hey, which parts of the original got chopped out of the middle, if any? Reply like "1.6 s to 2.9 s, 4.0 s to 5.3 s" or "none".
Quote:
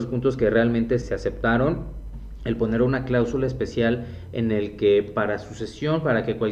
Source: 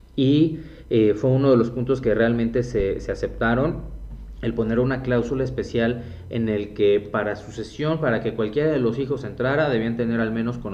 2.7 s to 3.0 s